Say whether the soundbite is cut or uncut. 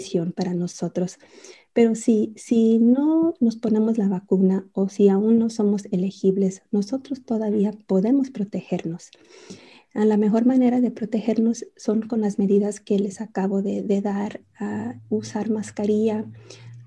uncut